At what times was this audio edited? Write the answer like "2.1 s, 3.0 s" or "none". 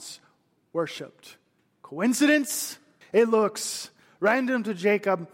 3.0 s